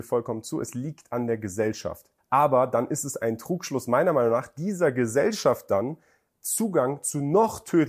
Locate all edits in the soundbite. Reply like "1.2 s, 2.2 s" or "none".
2.2 s